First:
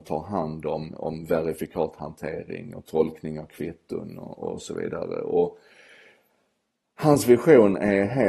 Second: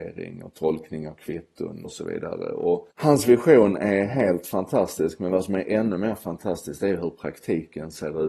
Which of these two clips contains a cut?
second; 2 cuts; at 1.8 s, 2.9 s

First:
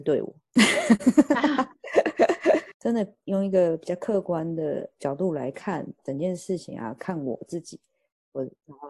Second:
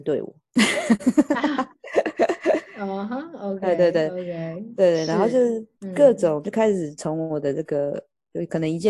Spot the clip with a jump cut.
first; 1 cut; at 2.7 s

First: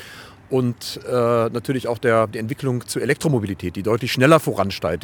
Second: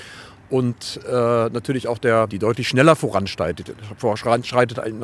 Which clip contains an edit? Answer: second; 1 cut; at 2.3 s

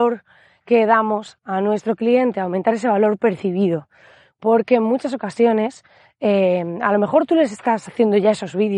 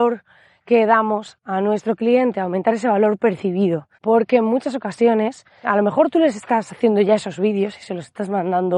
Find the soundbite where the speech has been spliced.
second; 2 cuts; at 3.9 s, 5.6 s

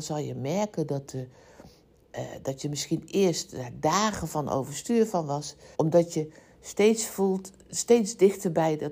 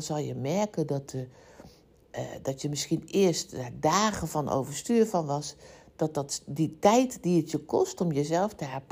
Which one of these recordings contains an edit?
first; 1 cut; at 5.7 s

